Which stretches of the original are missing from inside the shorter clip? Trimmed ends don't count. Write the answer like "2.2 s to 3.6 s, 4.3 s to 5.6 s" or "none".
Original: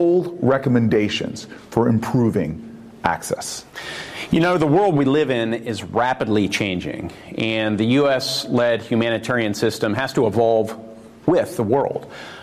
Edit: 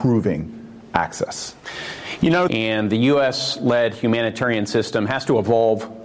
4.6 s to 7.4 s